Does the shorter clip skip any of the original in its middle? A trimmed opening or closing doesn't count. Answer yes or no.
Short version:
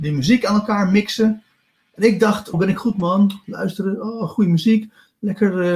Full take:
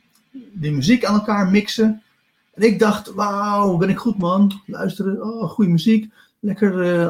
yes